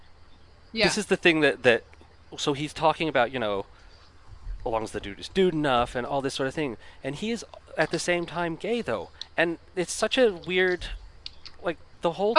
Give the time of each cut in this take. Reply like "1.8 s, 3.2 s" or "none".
none